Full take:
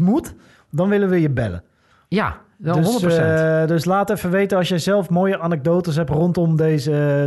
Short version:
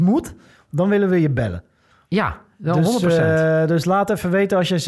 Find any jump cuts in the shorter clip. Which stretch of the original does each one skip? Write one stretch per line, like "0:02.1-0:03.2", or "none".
none